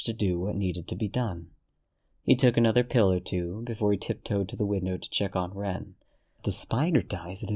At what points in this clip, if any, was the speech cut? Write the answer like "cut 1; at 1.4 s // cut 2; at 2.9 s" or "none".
cut 1; at 6.4 s